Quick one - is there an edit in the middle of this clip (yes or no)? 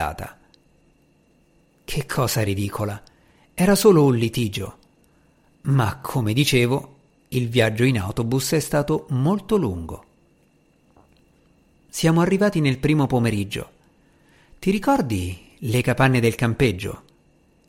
no